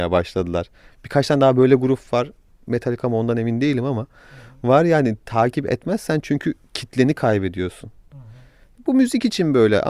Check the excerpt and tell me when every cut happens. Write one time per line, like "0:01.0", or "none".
none